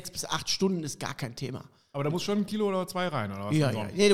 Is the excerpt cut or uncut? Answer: uncut